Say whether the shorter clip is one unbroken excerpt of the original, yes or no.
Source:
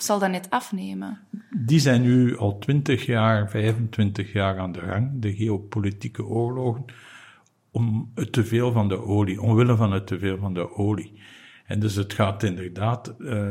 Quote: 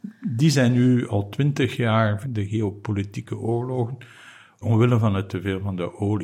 no